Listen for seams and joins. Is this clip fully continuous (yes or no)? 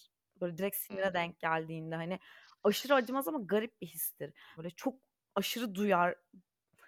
no